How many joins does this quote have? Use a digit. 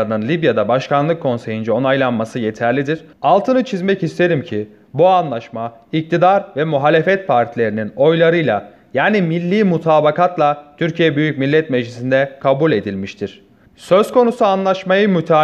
2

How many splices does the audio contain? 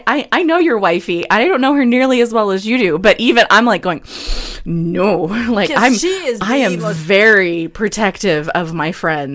0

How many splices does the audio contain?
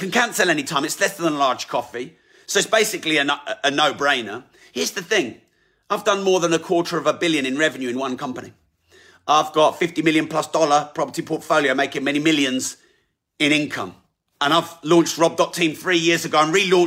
0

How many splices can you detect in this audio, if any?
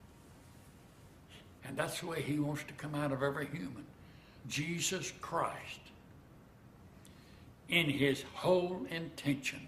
2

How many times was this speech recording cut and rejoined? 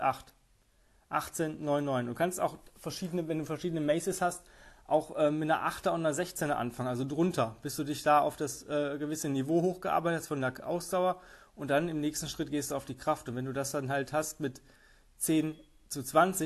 0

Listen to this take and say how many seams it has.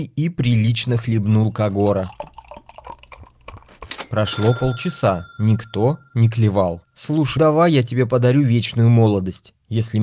1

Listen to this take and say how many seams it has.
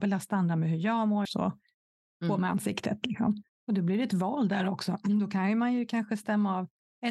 2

